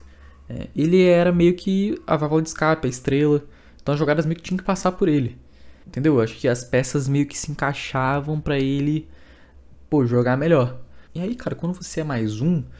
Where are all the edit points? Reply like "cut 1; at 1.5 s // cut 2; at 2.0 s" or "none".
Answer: cut 1; at 5.8 s // cut 2; at 11.1 s

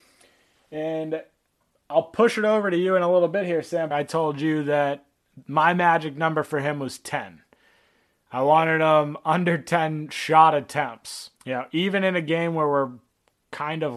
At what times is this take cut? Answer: cut 1; at 3.9 s // cut 2; at 11.3 s

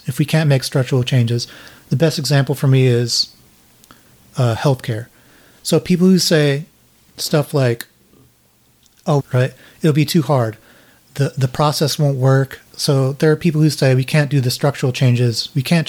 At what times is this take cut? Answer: cut 1; at 9.2 s // cut 2; at 12.7 s

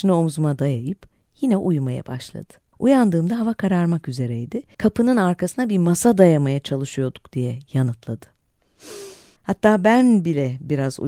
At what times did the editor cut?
cut 1; at 2.7 s // cut 2; at 4.7 s // cut 3; at 9.4 s

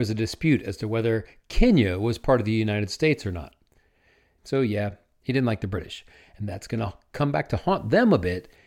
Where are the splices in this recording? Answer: cut 1; at 4.4 s

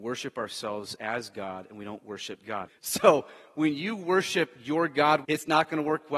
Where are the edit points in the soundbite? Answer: cut 1; at 2.7 s // cut 2; at 5.2 s

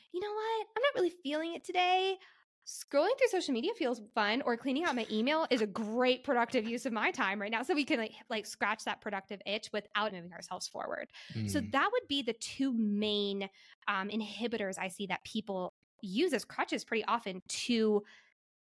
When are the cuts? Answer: cut 1; at 10.1 s

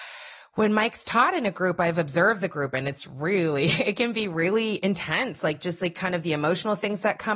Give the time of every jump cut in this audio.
none

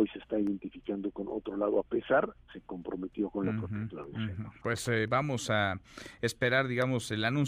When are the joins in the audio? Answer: cut 1; at 2.5 s

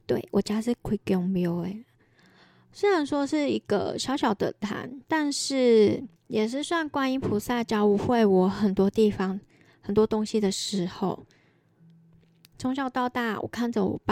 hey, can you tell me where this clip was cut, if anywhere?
cut 1; at 6.2 s

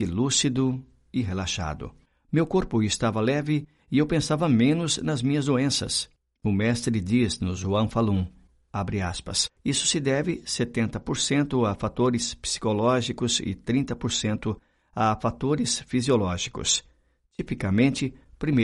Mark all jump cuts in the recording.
cut 1; at 9.6 s

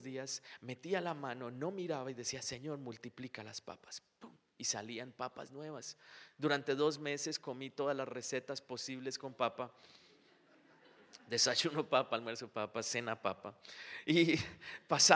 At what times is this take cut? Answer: none

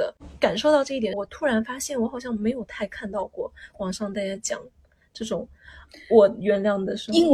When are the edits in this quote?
cut 1; at 1.1 s

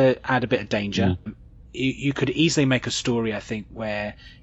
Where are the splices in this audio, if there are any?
cut 1; at 1.3 s

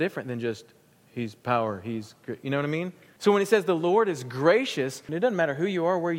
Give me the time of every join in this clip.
cut 1; at 3.2 s // cut 2; at 5.1 s

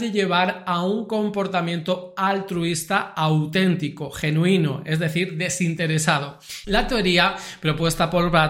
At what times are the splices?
cut 1; at 6.6 s

